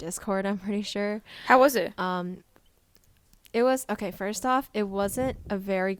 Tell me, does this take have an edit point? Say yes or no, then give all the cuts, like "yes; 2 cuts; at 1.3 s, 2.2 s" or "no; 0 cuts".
no; 0 cuts